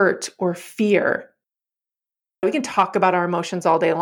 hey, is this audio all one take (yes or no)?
no